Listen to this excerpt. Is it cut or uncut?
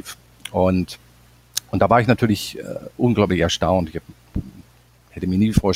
uncut